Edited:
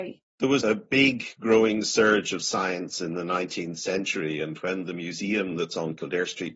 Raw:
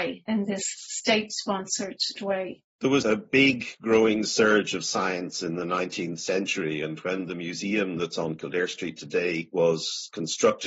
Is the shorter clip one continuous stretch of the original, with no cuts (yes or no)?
yes